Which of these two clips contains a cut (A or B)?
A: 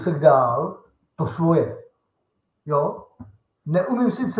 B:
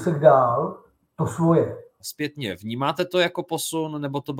B